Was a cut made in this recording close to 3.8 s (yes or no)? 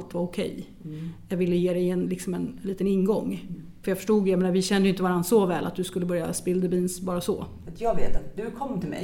yes